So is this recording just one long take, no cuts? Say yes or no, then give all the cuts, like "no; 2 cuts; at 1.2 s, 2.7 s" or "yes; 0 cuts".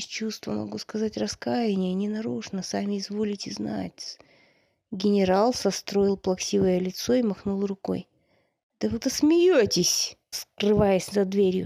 no; 2 cuts; at 9.0 s, 10.3 s